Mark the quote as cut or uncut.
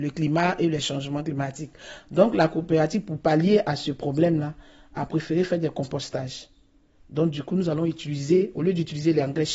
uncut